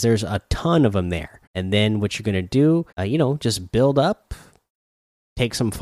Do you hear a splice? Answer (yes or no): yes